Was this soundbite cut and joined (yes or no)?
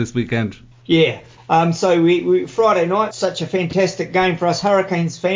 yes